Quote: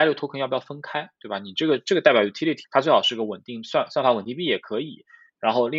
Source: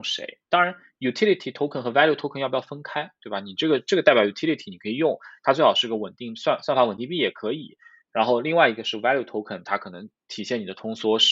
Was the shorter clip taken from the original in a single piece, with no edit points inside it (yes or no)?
no